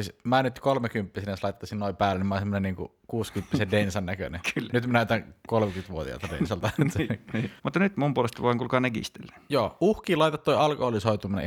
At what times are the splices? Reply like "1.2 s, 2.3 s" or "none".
7.6 s